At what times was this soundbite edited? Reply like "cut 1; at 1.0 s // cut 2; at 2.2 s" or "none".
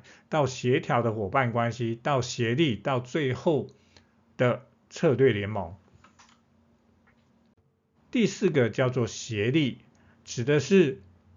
cut 1; at 7.9 s